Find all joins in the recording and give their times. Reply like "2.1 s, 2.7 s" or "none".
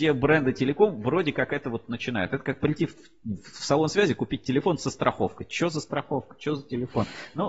none